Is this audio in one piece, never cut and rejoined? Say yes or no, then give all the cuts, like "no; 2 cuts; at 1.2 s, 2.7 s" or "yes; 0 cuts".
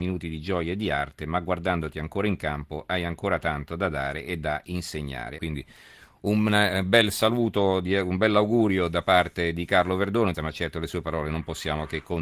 no; 2 cuts; at 5.4 s, 10.3 s